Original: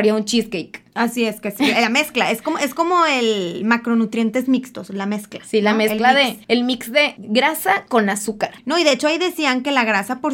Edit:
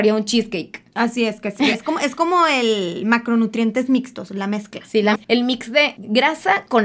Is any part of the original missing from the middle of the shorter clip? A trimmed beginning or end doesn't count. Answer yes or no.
yes